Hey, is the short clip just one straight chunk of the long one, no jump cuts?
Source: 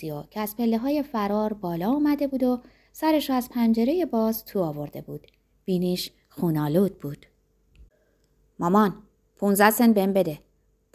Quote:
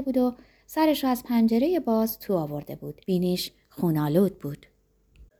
no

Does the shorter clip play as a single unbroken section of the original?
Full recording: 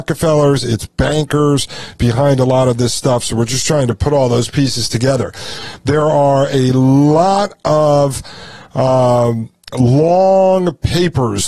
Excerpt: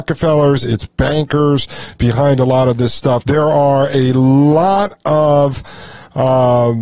no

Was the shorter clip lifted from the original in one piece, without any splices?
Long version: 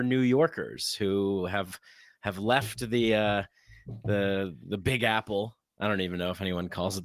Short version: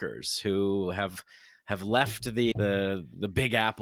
no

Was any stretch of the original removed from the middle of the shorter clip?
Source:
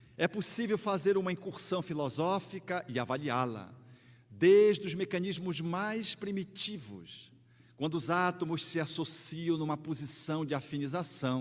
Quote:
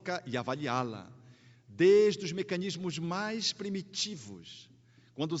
no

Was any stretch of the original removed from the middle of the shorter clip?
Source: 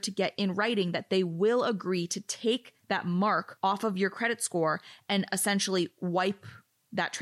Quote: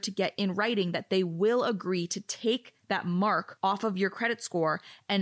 no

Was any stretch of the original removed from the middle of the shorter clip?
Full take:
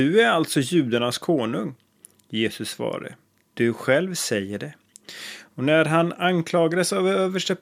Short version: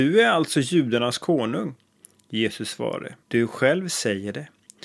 yes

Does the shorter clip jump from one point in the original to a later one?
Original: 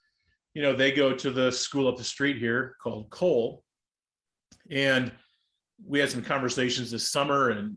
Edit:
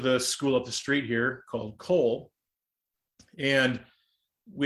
no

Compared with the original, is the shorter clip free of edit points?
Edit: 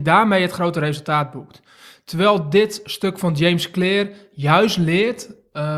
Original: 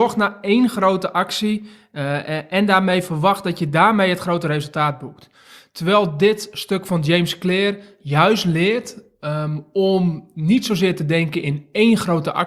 yes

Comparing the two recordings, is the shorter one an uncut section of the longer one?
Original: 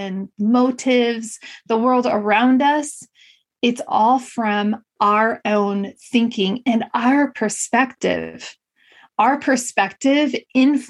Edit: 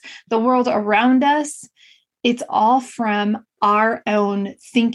yes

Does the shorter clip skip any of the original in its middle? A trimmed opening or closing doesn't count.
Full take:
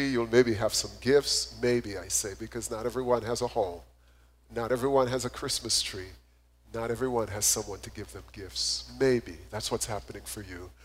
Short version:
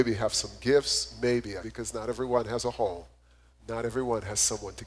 yes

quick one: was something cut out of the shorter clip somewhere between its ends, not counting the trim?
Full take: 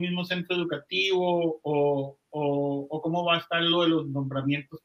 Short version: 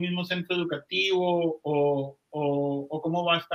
no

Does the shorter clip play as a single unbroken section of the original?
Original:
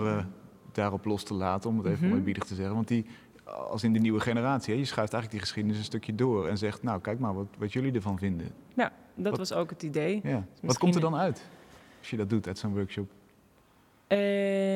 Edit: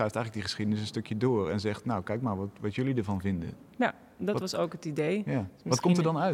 yes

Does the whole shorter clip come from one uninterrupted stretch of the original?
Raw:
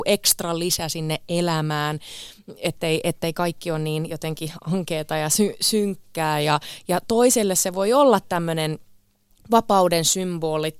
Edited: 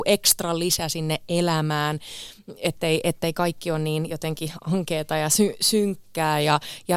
yes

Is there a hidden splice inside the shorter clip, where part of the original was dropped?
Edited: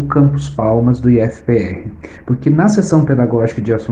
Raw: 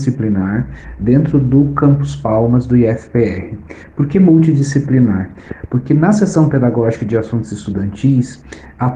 yes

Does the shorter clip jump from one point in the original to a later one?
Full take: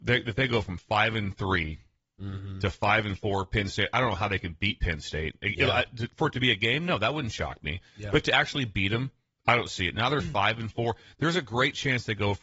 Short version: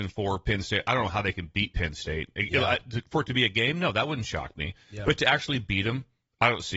no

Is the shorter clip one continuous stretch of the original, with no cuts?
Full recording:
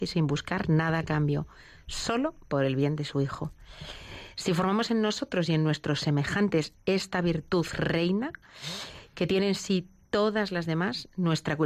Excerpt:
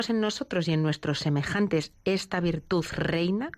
yes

